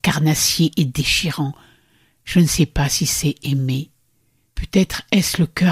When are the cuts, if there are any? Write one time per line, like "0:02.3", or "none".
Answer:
0:04.5